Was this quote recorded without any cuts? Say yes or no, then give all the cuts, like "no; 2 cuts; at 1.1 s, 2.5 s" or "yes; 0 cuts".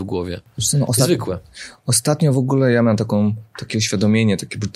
yes; 0 cuts